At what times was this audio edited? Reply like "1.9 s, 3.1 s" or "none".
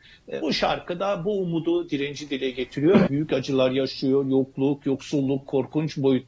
3.1 s